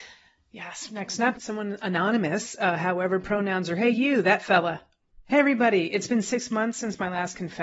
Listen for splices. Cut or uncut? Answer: cut